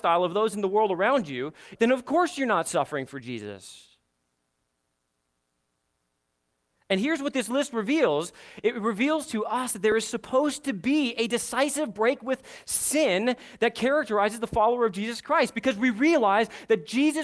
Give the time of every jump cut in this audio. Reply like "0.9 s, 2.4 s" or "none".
1.8 s